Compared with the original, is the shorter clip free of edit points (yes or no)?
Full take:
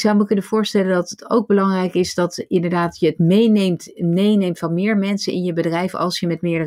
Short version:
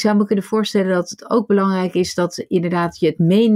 yes